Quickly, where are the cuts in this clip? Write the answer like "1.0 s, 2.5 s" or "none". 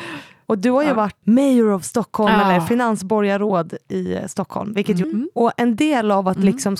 1.2 s, 5.0 s